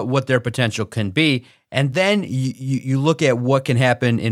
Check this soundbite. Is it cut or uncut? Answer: uncut